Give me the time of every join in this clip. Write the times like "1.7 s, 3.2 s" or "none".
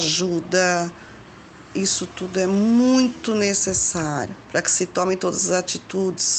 1.7 s